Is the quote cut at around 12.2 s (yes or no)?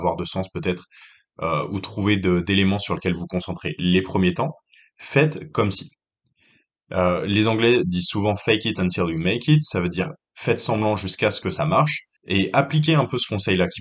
yes